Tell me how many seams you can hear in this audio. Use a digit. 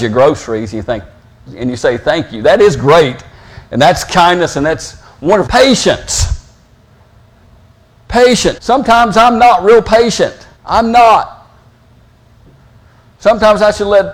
3